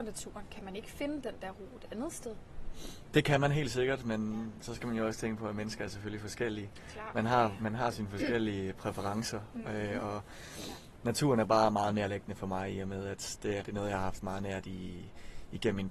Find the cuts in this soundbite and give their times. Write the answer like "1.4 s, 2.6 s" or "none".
13.6 s